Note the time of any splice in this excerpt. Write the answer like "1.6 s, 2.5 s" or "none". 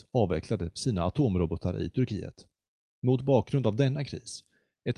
none